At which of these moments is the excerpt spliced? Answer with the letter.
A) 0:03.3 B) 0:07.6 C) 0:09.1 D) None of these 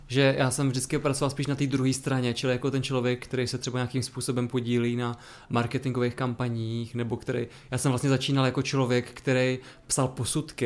D